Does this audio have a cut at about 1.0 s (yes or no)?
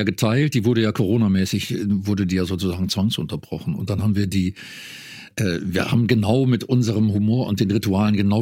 no